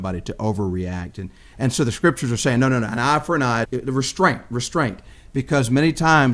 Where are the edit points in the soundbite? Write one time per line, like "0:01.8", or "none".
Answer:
0:01.5
0:03.6